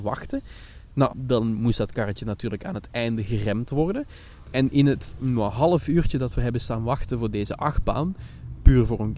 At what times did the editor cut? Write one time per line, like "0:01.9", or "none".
0:01.1
0:04.4

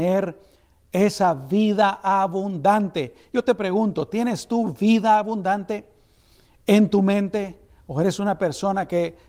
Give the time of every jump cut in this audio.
none

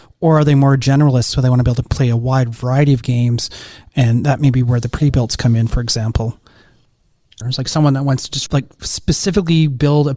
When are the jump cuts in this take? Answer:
0:07.4
0:08.5

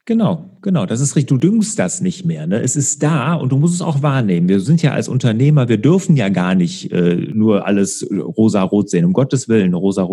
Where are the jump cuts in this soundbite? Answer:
none

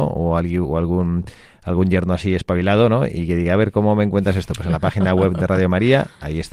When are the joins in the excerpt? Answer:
none

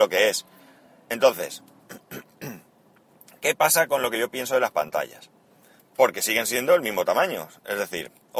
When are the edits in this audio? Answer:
0:01.1
0:05.8

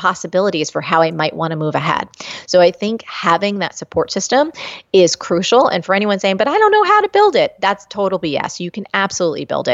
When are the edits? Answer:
none

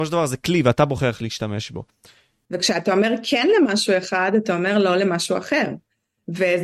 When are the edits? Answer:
0:02.5

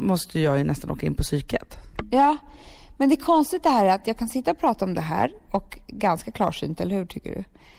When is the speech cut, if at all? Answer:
none

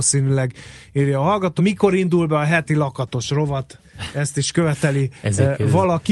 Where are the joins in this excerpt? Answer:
0:01.6

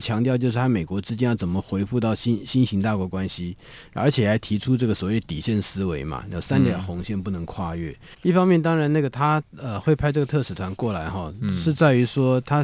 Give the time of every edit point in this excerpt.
0:08.1

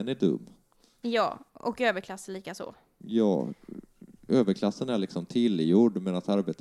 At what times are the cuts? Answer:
none

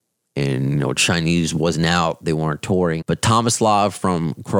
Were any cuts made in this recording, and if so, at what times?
0:03.0

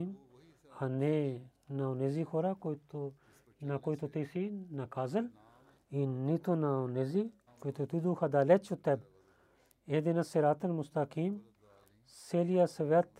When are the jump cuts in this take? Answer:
0:07.5

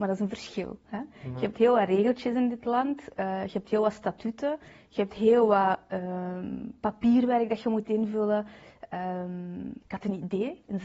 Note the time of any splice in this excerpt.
0:09.8

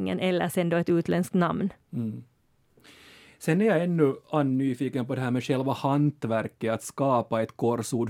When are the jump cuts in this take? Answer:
none

